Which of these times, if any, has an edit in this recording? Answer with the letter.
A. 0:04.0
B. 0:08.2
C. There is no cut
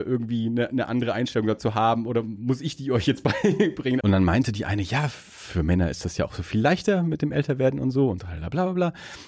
A